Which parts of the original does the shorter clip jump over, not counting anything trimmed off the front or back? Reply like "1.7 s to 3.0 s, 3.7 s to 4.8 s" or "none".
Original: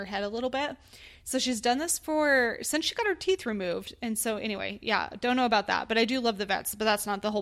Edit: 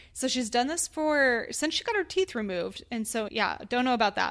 4.4 s to 4.8 s